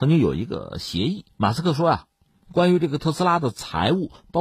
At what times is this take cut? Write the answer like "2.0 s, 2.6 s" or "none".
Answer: none